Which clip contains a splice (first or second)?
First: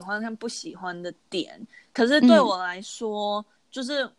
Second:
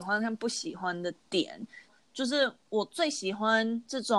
second